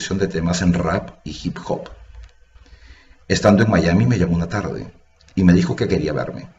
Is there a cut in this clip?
no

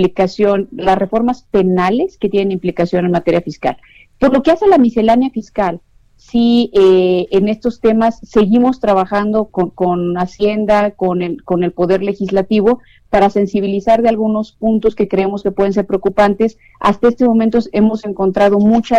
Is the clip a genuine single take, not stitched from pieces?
no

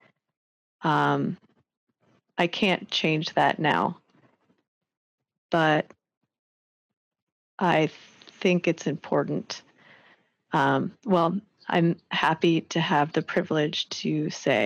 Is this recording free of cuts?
yes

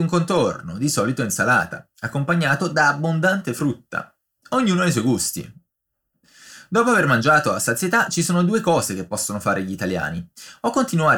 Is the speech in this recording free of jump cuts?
no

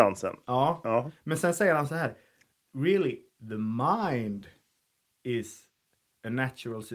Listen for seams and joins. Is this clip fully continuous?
yes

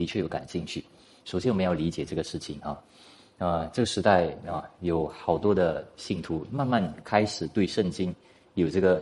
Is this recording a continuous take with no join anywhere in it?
no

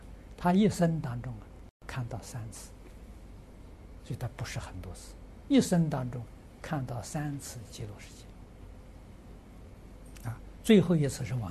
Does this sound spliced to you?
no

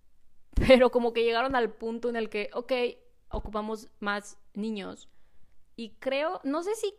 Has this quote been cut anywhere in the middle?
yes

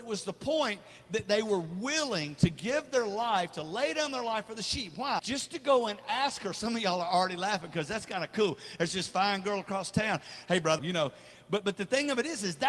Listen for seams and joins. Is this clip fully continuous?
no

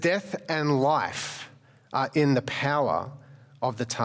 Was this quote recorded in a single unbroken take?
yes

